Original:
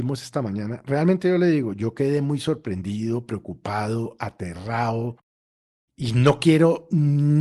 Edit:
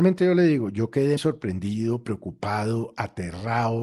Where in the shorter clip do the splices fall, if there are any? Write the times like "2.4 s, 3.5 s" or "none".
1.2 s